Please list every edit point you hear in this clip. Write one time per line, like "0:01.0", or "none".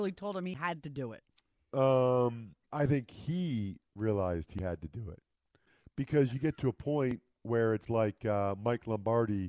0:02.6